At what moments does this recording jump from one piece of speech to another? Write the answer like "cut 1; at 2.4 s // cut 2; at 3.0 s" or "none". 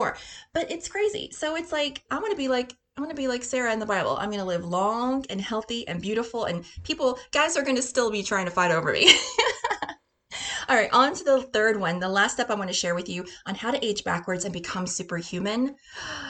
cut 1; at 2.1 s